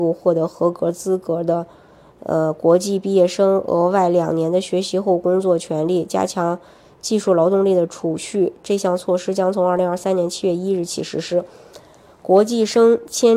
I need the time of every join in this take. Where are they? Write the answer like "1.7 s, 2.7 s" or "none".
none